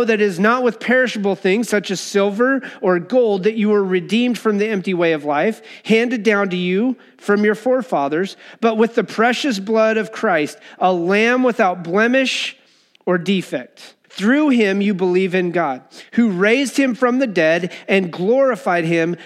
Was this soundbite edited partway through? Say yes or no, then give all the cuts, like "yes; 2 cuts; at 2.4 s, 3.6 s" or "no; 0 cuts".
yes; 1 cut; at 14.0 s